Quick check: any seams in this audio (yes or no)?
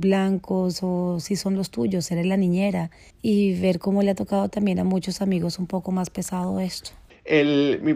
no